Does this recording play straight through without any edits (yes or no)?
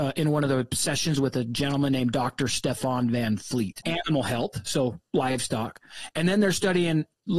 no